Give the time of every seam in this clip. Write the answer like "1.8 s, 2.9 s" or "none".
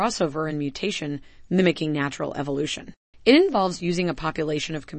3.1 s

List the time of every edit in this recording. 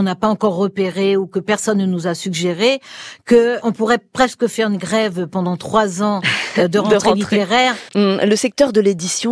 3.6 s, 7.9 s

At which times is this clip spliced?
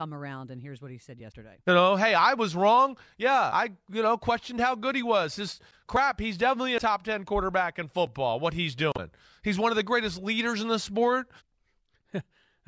11.4 s

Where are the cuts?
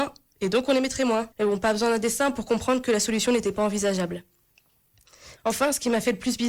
1.3 s, 5.4 s

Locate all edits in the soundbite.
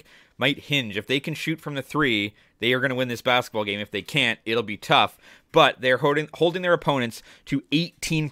none

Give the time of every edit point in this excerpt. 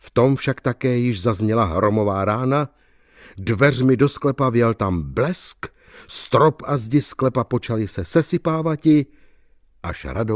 none

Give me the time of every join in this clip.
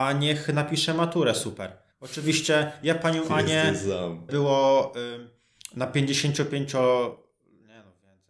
1.9 s, 4.3 s

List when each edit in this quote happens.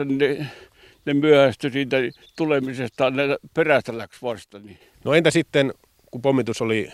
none

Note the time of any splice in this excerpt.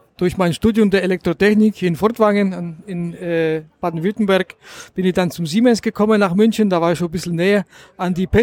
none

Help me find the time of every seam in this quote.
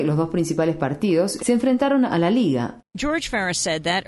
1.4 s, 2.8 s

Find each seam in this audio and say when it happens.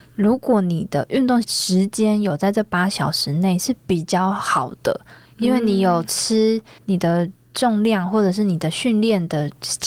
1.4 s, 6.8 s

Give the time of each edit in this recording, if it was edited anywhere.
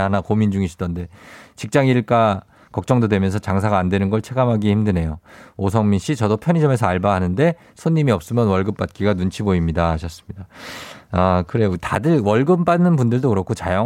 none

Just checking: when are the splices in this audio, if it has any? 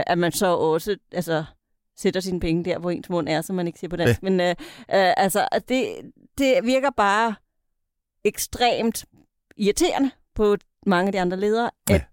none

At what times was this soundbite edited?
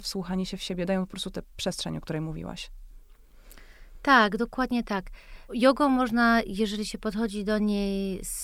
5.5 s

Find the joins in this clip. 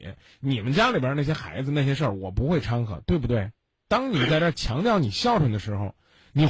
3.9 s

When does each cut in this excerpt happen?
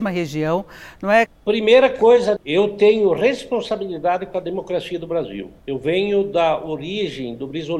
1.3 s, 2.4 s, 5.6 s

